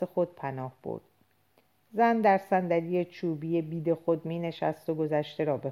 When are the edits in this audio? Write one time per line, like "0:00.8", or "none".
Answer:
none